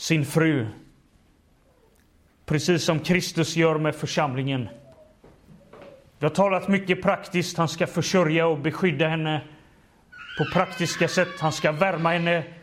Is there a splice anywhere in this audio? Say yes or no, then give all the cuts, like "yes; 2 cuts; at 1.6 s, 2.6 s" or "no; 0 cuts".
no; 0 cuts